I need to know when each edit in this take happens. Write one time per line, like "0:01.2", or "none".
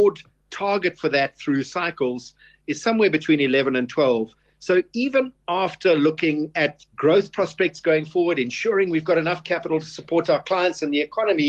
0:06.9